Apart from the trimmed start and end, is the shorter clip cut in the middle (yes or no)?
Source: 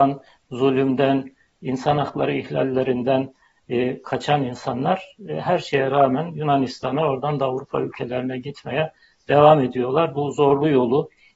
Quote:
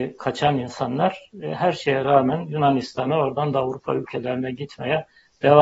no